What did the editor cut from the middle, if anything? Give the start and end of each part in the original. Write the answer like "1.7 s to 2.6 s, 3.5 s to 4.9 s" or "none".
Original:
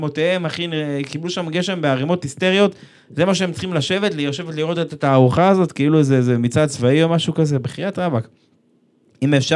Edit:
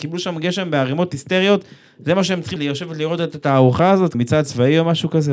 3.7 s to 4.1 s, 5.7 s to 6.4 s